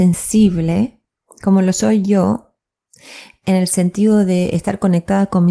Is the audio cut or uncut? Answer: uncut